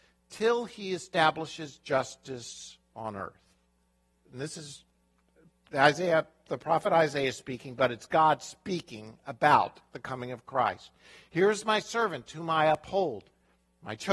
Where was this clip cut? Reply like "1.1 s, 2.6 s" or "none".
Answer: 4.2 s